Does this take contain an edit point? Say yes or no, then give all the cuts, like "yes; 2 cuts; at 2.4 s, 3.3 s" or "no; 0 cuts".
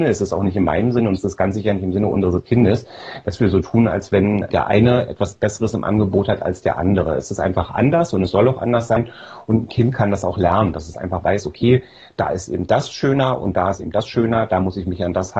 no; 0 cuts